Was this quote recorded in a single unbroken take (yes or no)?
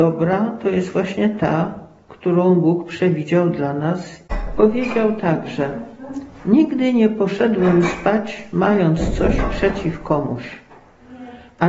yes